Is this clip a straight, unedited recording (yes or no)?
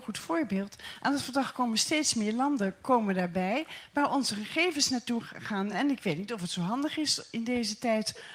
yes